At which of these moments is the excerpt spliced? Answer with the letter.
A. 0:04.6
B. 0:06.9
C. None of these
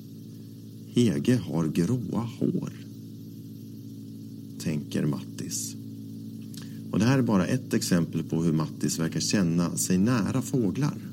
A